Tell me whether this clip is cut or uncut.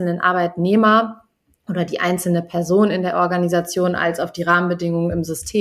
uncut